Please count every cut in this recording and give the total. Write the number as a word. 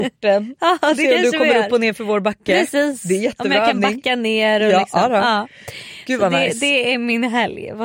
zero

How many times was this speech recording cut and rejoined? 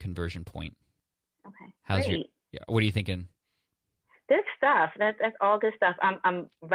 one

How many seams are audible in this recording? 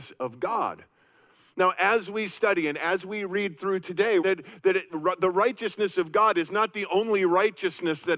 one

